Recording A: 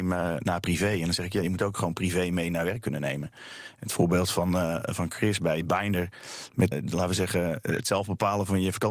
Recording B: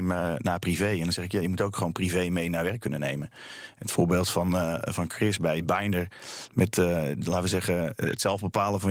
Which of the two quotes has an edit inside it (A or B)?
A